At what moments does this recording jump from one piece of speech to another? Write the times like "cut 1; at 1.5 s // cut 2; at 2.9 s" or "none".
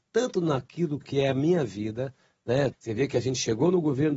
cut 1; at 2.7 s

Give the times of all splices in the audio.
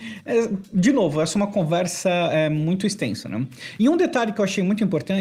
none

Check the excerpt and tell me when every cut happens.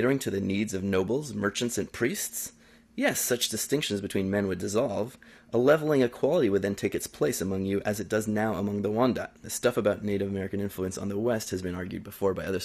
cut 1; at 9.4 s

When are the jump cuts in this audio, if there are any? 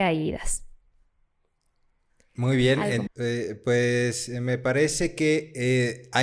cut 1; at 3.1 s

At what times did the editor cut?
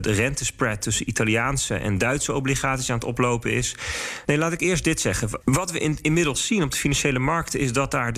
cut 1; at 4.2 s // cut 2; at 5.4 s

